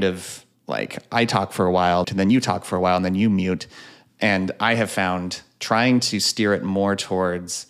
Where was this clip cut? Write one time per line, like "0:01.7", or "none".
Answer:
0:02.0